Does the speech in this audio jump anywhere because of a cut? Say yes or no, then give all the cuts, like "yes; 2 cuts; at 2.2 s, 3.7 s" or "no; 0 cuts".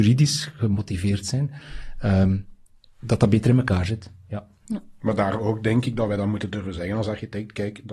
no; 0 cuts